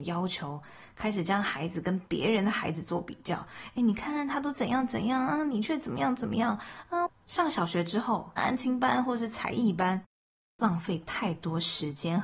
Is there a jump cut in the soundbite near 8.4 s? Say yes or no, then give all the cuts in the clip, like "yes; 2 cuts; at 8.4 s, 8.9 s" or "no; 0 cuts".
yes; 2 cuts; at 7.1 s, 8.4 s